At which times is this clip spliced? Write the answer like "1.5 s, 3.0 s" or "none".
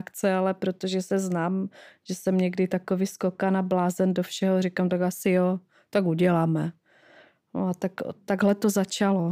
none